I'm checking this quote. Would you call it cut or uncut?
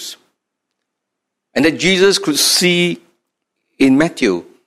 uncut